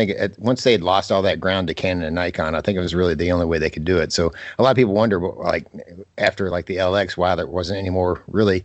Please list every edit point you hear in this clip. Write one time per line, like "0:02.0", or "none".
none